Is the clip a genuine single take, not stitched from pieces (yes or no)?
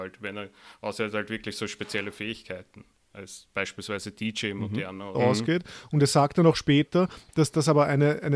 no